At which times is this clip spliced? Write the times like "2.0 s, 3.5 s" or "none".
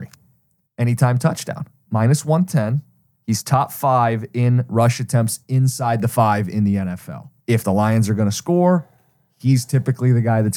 7.4 s